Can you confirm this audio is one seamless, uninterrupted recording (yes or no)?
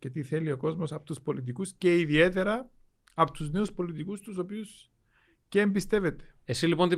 yes